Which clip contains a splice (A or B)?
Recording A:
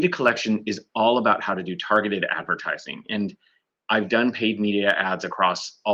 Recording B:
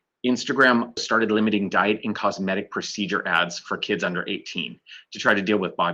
B